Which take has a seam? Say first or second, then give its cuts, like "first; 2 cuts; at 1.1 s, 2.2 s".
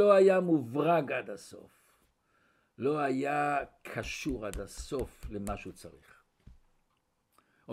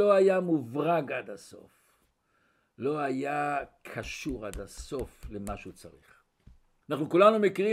second; 1 cut; at 6.8 s